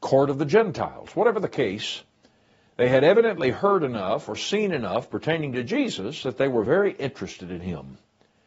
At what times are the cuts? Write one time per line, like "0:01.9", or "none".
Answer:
none